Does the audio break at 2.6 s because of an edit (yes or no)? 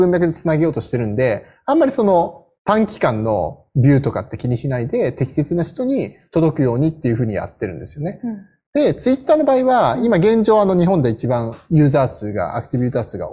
yes